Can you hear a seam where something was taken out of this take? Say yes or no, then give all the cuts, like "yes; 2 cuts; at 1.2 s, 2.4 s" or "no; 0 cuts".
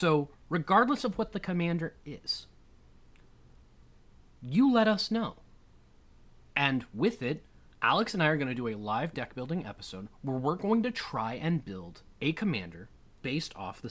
no; 0 cuts